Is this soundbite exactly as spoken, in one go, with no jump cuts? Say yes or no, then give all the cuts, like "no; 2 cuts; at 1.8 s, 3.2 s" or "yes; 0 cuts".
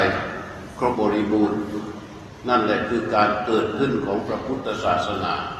no; 1 cut; at 0.9 s